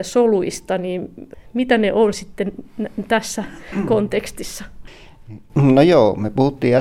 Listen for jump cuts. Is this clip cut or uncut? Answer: uncut